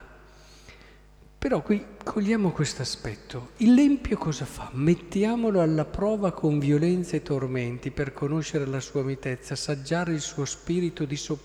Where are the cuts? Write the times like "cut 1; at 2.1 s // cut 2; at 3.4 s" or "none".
none